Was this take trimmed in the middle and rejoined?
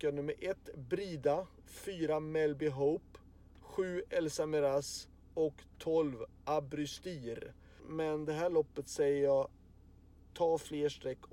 yes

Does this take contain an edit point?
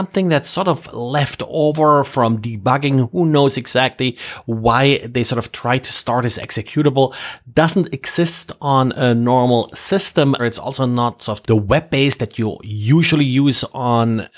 yes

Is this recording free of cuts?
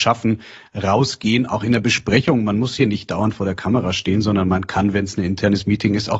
yes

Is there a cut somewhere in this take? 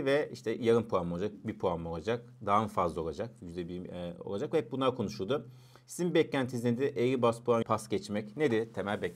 yes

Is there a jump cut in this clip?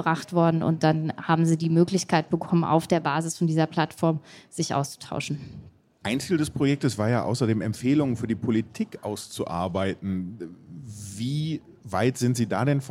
no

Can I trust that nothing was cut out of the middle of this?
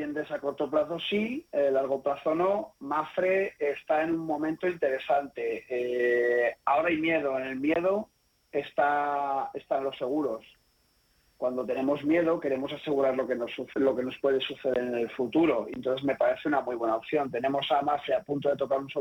yes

